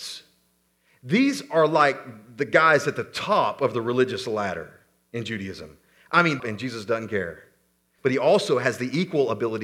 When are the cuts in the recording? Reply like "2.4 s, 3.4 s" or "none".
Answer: 6.4 s, 8.0 s